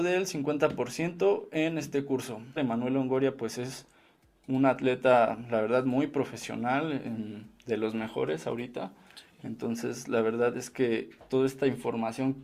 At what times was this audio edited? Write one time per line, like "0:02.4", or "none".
0:02.6